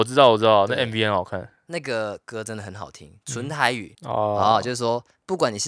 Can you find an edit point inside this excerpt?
yes; 1 cut; at 3.9 s

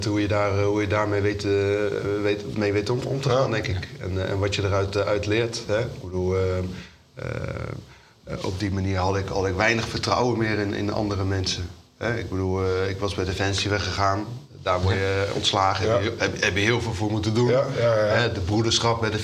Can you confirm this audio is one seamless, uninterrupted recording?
yes; 0 cuts

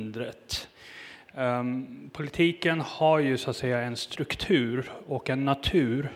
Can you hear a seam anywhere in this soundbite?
no; 0 cuts

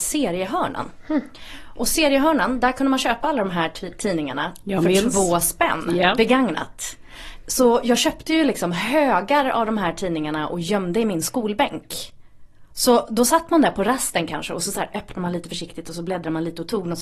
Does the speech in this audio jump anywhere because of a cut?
no; 0 cuts

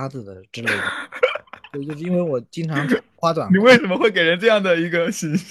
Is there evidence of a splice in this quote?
no; 0 cuts

